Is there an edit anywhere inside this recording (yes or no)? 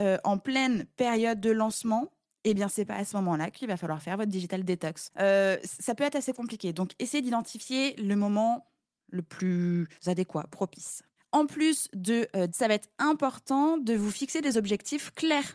yes